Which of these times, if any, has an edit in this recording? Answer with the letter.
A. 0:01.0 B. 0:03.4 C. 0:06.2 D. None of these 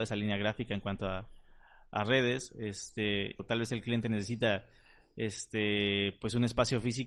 B